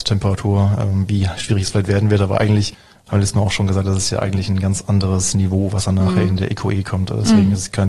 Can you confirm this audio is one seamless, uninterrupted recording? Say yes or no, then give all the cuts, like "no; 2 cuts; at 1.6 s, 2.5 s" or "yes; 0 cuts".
yes; 0 cuts